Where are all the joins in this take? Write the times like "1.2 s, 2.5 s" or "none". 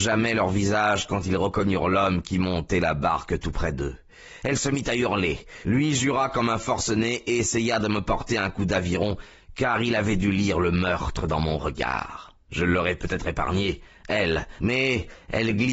12.4 s, 14.6 s